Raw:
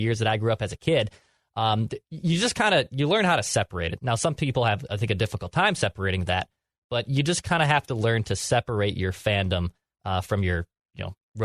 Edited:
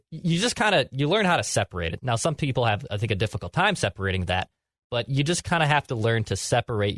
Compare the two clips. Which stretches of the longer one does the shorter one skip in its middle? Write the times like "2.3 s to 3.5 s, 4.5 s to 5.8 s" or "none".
none